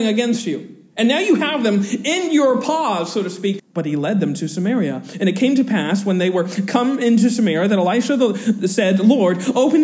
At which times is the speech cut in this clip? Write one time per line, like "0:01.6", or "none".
0:03.6